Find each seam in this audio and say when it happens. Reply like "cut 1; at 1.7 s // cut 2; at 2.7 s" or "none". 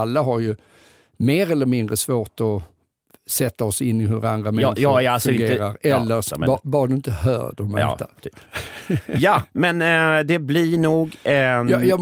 cut 1; at 6.3 s